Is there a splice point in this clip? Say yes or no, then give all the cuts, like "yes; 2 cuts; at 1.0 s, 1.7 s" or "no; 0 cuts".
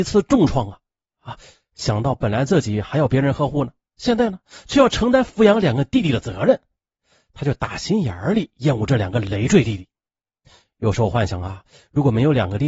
no; 0 cuts